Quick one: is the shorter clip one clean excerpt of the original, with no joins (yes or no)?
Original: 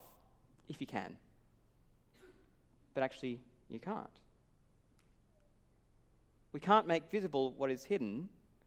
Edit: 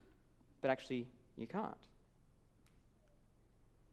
yes